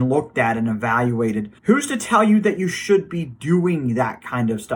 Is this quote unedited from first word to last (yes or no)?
no